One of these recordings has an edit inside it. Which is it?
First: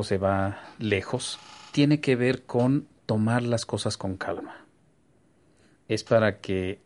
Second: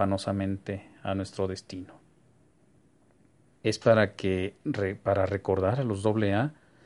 second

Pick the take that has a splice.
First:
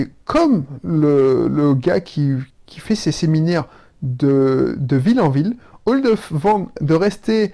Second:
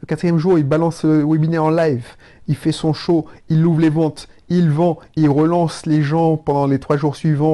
first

